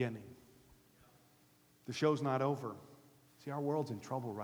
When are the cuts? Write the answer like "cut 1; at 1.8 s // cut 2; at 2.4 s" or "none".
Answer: cut 1; at 3.3 s